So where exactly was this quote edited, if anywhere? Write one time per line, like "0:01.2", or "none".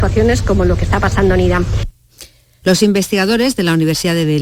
0:02.6